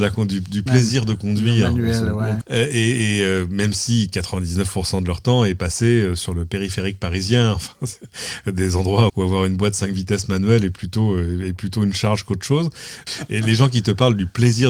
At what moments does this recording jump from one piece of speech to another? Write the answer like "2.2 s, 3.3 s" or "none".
2.4 s, 9.1 s, 13.1 s